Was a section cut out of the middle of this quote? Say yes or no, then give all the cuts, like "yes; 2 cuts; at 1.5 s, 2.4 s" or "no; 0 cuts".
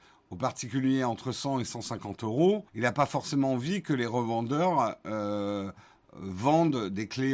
yes; 1 cut; at 2.7 s